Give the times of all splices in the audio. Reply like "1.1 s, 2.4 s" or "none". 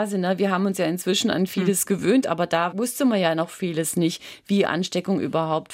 none